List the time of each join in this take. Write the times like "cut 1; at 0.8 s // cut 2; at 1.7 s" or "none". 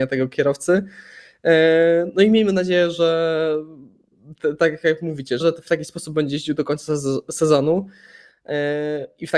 cut 1; at 5.4 s